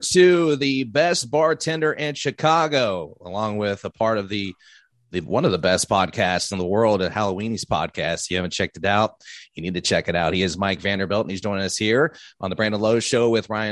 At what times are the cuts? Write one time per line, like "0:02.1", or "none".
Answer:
none